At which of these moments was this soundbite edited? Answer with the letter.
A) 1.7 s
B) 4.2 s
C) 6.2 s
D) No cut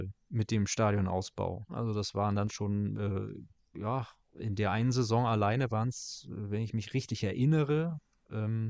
A